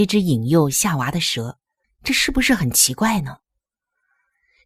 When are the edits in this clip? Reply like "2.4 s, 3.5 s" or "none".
1.8 s

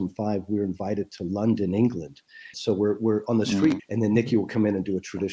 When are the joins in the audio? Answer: 2.5 s, 3.8 s

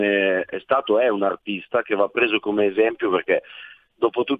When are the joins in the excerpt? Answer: none

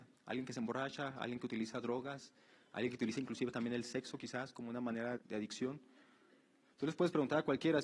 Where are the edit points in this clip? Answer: 5.2 s

